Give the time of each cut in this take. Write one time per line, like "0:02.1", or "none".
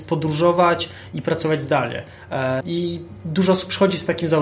0:02.6